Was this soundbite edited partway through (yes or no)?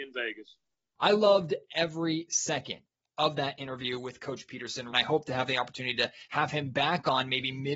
yes